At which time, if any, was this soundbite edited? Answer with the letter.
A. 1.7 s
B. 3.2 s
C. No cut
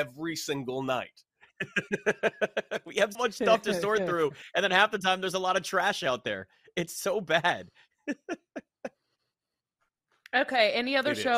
B